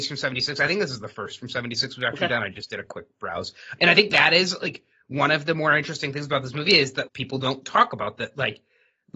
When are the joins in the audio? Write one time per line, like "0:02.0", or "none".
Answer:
0:03.8
0:07.1